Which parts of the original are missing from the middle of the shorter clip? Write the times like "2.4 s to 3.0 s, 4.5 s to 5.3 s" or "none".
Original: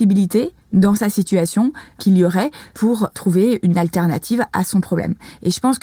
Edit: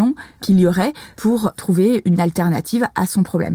none